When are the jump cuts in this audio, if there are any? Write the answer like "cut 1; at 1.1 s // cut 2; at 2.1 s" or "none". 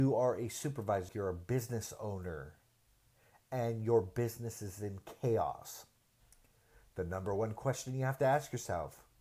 cut 1; at 1.1 s